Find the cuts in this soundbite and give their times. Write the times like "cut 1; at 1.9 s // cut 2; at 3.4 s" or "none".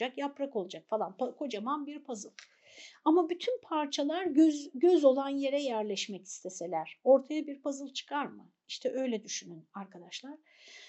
none